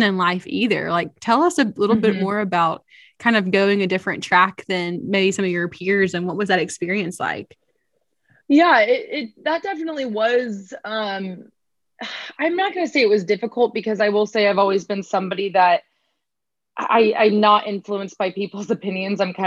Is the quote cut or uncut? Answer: uncut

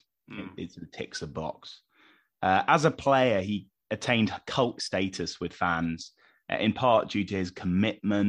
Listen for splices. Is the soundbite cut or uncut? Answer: cut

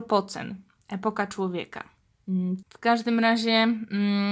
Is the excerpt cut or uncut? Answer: cut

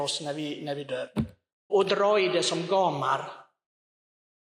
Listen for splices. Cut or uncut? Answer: cut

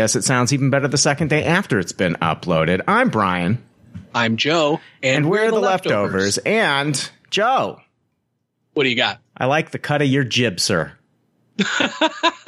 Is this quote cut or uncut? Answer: uncut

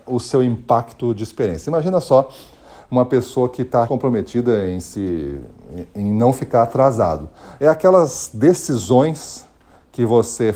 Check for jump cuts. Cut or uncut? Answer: cut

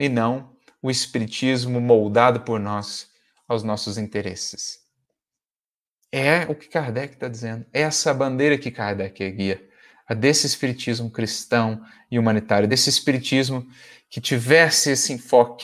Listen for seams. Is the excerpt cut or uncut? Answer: uncut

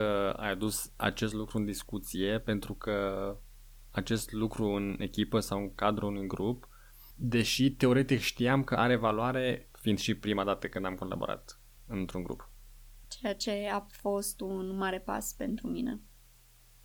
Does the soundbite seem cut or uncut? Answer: cut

